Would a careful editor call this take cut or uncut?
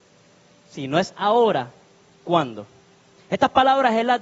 uncut